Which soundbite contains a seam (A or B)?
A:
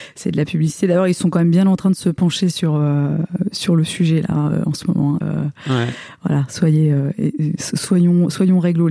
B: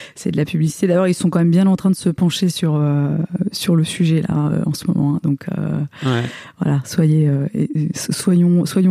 A